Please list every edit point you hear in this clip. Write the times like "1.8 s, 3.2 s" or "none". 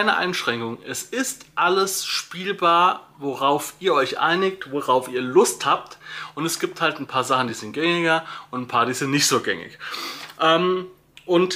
none